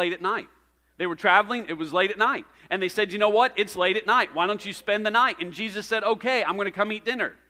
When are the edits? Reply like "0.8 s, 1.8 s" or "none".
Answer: none